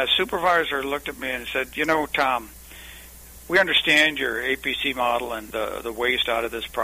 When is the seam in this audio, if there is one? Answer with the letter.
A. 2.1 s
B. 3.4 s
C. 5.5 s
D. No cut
C